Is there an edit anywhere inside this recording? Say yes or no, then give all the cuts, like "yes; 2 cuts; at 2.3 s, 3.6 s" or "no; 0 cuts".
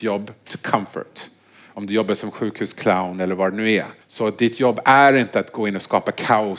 yes; 1 cut; at 4.0 s